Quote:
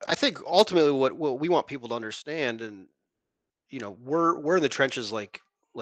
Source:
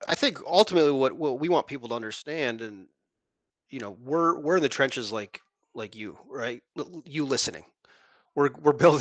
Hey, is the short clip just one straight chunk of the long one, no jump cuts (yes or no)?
yes